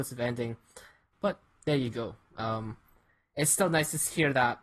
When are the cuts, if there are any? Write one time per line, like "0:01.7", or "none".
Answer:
0:01.1